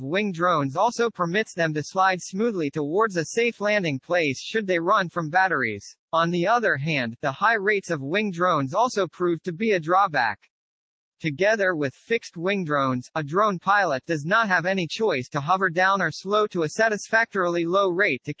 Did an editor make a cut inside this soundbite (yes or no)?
yes